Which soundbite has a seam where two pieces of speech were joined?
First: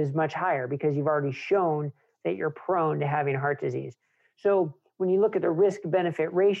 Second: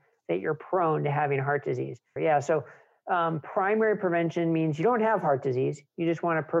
second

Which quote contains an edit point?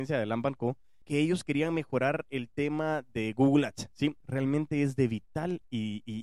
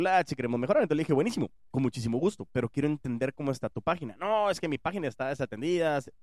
first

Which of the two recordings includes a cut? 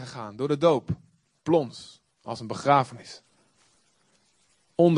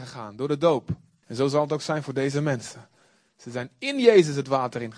second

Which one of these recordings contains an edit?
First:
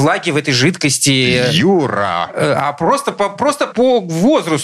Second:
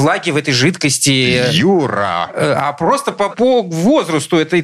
second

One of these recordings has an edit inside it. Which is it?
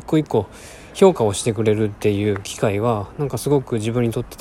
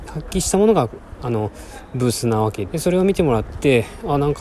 second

